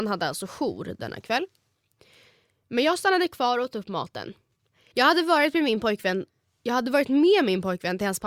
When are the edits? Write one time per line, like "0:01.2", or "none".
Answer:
0:04.9